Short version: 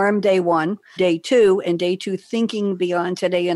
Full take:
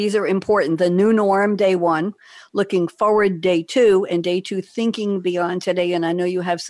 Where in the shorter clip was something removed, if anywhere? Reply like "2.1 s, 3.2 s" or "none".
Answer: 1.0 s